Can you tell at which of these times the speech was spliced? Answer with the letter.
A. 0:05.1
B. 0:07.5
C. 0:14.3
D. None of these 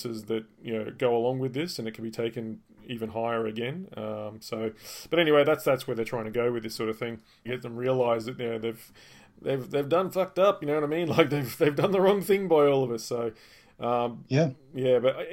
B